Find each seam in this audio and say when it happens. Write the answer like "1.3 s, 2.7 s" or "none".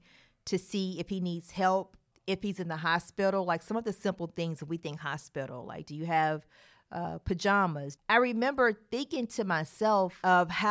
2.1 s, 8.0 s

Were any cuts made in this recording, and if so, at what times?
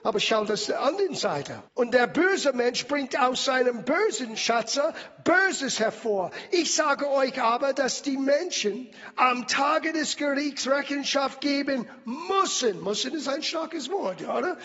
1.7 s

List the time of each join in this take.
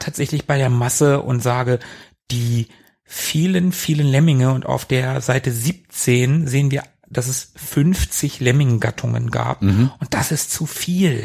none

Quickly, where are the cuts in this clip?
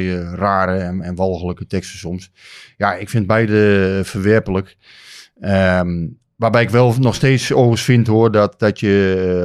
none

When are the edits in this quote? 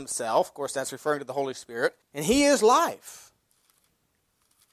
2.0 s

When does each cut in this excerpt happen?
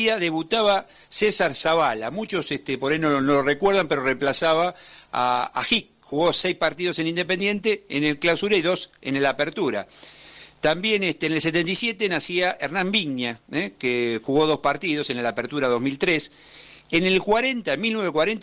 none

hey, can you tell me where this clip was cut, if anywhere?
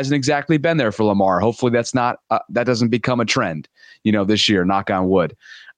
none

